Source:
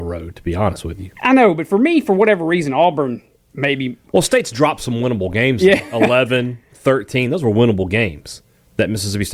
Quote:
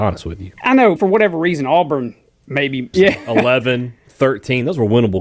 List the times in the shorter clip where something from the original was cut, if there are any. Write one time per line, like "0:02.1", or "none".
0:01.0
0:02.9